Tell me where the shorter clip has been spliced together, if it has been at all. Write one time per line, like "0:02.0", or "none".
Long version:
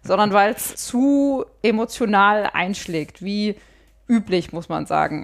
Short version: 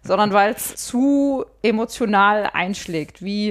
none